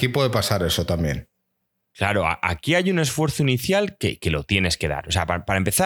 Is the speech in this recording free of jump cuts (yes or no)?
yes